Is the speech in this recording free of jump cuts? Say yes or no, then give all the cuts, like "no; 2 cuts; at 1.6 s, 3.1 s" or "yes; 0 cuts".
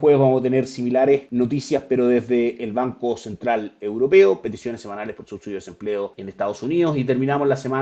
yes; 0 cuts